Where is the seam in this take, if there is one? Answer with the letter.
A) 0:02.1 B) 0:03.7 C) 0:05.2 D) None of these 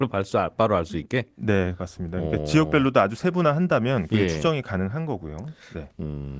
D